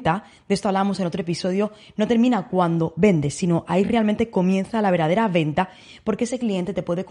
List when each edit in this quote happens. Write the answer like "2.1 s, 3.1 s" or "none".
none